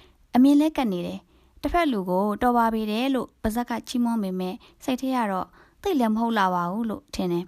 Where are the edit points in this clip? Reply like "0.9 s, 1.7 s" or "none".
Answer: none